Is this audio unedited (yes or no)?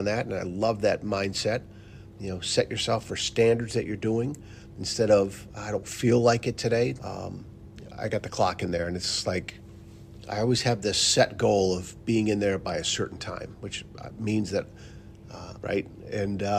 no